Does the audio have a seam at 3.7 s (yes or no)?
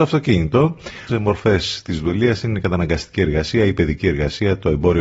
no